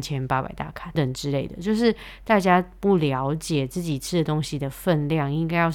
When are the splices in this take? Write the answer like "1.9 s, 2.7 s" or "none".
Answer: 1.0 s